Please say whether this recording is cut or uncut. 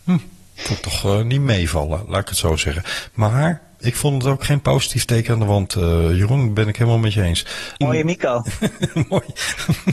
cut